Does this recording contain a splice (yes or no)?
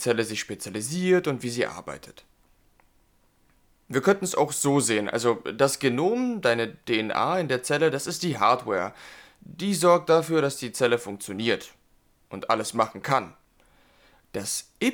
no